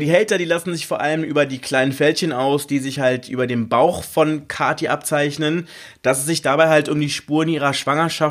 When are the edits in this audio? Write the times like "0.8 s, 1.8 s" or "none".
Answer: none